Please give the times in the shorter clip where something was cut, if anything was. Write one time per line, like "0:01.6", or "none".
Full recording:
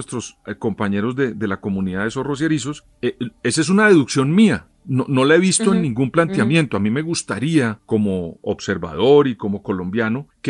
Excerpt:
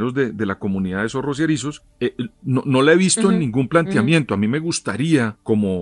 0:02.3